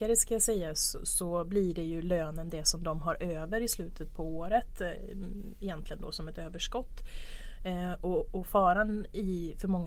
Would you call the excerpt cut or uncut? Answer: uncut